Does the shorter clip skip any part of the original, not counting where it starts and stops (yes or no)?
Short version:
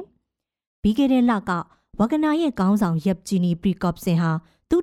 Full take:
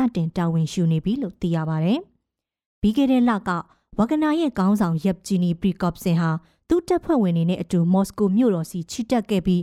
no